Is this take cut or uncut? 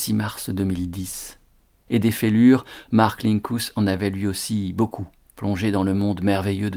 cut